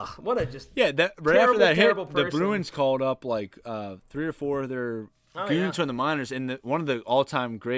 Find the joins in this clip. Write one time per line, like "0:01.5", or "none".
none